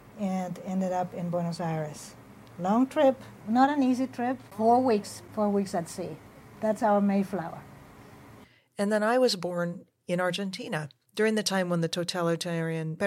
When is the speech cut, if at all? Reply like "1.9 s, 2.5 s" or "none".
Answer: none